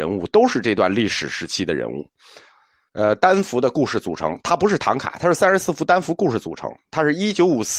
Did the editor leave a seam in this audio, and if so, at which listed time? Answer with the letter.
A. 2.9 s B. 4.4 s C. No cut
A